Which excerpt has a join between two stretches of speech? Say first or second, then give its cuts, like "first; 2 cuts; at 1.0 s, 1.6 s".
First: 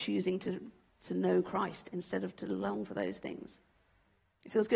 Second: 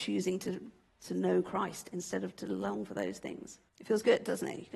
second; 1 cut; at 3.7 s